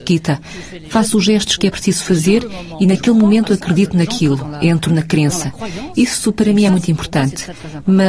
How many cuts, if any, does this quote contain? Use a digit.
0